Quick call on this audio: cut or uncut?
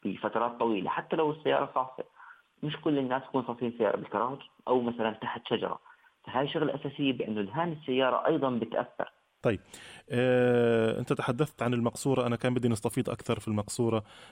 uncut